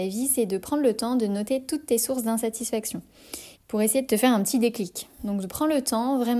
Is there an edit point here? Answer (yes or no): yes